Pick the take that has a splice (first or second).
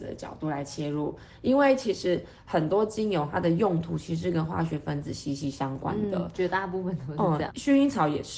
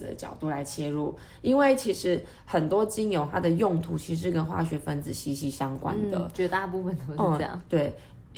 first